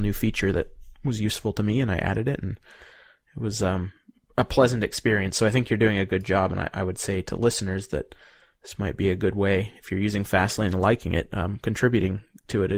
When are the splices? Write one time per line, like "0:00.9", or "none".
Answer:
none